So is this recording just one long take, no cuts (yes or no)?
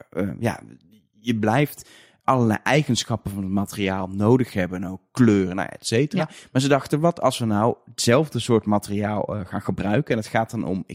yes